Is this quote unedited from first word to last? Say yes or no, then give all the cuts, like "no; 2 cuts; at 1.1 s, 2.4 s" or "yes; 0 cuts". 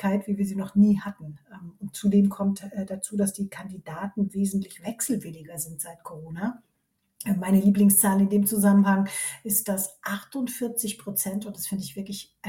yes; 0 cuts